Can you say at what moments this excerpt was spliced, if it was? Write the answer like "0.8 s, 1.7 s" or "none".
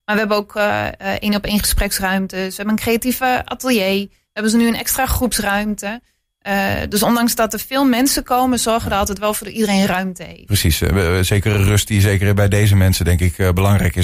none